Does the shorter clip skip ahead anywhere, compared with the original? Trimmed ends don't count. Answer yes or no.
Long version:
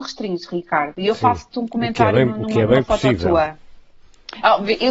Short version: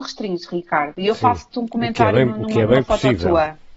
no